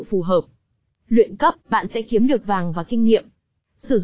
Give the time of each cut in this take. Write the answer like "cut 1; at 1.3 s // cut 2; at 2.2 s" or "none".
cut 1; at 1.6 s